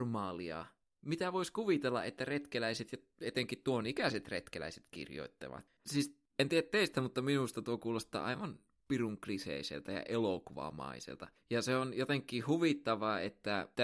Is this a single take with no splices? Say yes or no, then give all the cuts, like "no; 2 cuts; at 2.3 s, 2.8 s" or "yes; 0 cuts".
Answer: no; 1 cut; at 5.8 s